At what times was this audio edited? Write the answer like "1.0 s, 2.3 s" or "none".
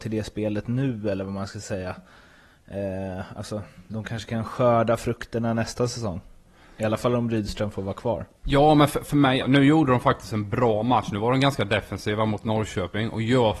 8.4 s, 9.4 s